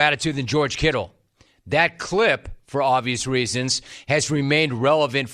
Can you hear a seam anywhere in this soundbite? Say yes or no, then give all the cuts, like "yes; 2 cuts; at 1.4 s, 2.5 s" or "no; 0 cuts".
no; 0 cuts